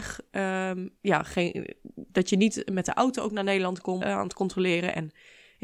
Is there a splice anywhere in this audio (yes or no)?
yes